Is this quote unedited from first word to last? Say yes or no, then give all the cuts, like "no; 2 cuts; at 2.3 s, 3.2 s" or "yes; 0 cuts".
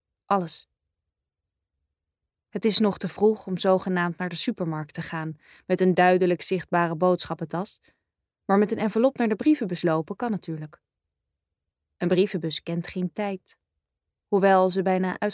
yes; 0 cuts